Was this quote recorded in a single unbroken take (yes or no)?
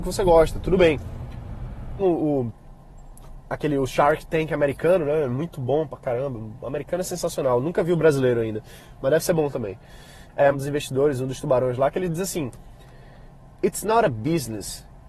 no